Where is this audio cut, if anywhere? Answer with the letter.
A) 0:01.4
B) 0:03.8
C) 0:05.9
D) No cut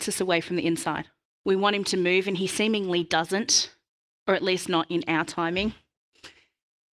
A